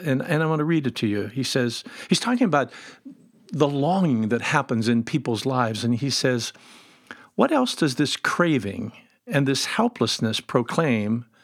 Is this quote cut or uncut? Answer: uncut